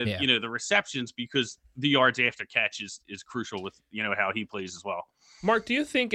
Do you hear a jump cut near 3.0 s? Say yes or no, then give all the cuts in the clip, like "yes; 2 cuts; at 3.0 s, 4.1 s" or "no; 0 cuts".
no; 0 cuts